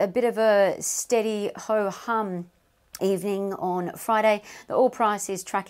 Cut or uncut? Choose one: cut